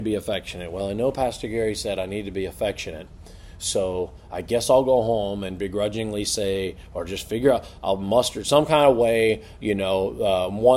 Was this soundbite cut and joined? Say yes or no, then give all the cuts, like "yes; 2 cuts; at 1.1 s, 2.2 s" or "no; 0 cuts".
no; 0 cuts